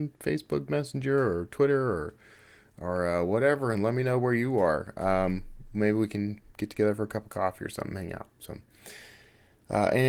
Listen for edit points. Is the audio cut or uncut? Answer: uncut